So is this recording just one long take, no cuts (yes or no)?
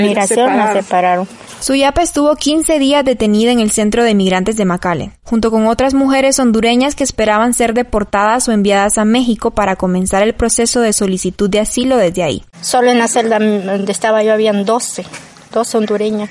no